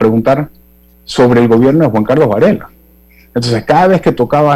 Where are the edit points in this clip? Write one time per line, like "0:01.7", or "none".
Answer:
none